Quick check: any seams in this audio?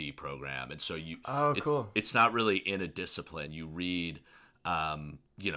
no; 0 cuts

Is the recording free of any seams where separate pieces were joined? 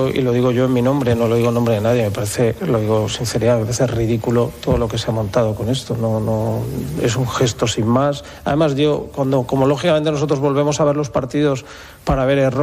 yes; 0 cuts

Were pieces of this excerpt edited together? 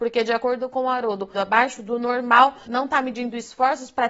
yes; 2 cuts; at 1.3 s, 2.7 s

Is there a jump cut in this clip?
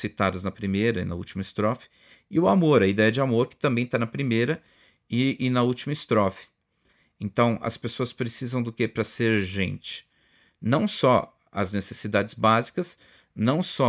no; 0 cuts

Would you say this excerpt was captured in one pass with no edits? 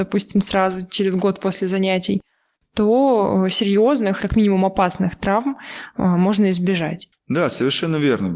yes; 0 cuts

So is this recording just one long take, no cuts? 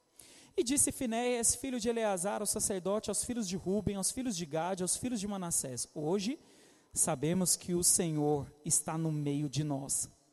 yes; 0 cuts

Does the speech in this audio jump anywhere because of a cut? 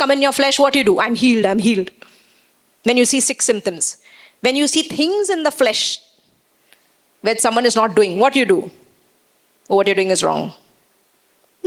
yes; 1 cut; at 1.4 s

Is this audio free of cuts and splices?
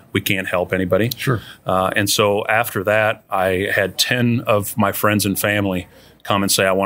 yes; 0 cuts

